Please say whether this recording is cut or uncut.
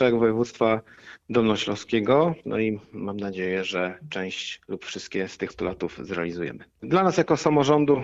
cut